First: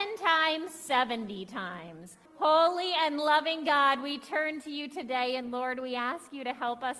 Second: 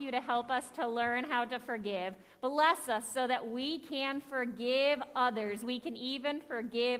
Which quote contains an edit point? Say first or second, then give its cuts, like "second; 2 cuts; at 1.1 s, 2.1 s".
first; 1 cut; at 2.3 s